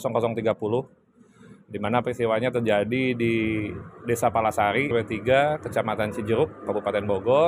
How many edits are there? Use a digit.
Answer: 1